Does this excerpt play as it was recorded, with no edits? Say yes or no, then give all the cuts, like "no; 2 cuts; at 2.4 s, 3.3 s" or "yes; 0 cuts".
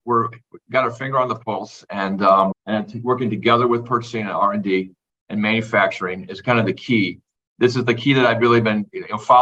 no; 1 cut; at 2.5 s